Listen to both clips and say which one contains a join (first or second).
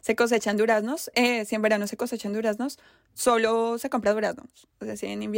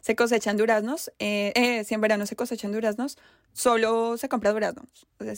first